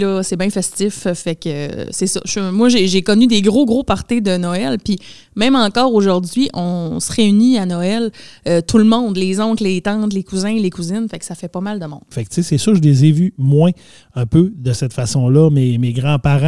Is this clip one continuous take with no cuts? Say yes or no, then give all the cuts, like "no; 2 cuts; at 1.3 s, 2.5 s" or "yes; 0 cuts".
no; 1 cut; at 12.1 s